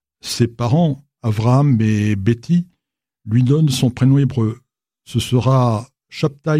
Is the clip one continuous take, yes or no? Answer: yes